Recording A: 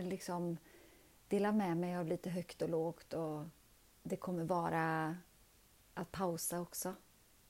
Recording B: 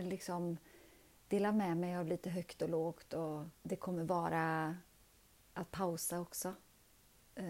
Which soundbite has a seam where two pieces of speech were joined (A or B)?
B